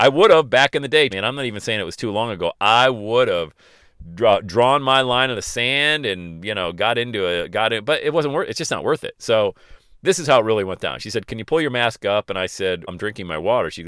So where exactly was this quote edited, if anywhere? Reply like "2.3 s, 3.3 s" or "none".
1.1 s, 12.9 s